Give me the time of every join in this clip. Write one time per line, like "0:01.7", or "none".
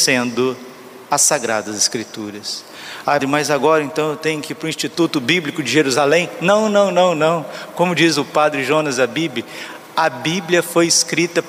0:03.2